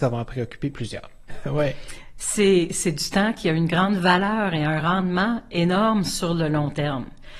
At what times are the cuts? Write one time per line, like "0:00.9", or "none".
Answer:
0:01.3